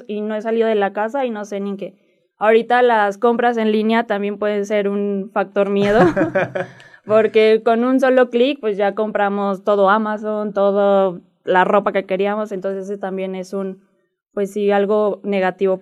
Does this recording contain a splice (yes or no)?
no